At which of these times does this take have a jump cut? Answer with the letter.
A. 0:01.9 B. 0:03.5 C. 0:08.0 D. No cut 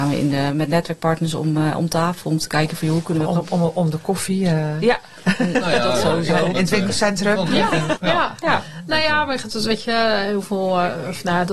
C